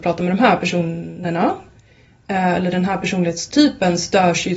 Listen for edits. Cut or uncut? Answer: uncut